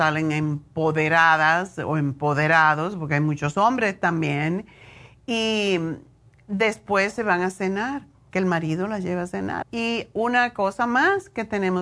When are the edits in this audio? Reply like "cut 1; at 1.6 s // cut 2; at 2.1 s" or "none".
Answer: cut 1; at 9.6 s